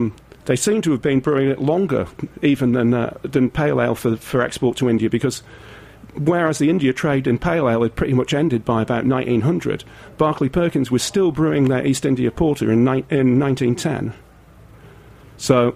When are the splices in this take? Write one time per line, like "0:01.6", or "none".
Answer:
none